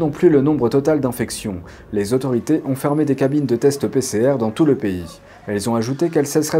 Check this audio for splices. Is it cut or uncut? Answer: uncut